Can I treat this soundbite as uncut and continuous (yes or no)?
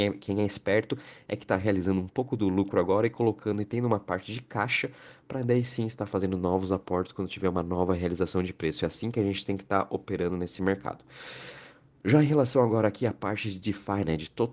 yes